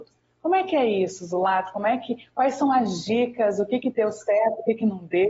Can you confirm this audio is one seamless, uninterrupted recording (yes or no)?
yes